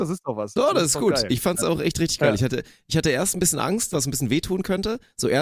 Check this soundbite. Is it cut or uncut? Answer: cut